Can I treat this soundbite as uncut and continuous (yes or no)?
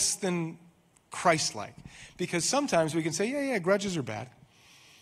yes